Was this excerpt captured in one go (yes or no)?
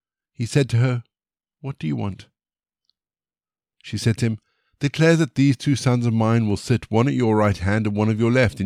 yes